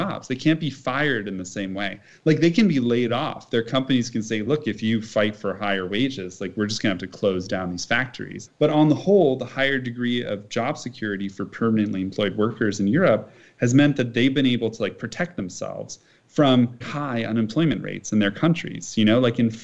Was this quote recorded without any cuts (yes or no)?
no